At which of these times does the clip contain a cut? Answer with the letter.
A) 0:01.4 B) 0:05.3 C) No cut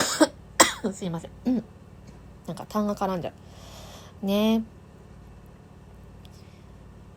C